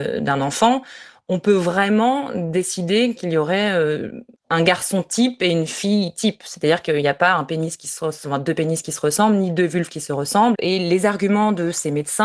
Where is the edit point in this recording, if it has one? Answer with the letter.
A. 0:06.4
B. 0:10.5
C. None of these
B